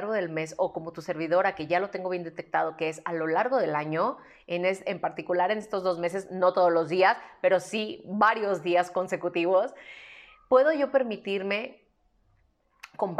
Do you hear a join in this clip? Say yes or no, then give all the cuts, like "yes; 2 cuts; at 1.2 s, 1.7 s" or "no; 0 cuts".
no; 0 cuts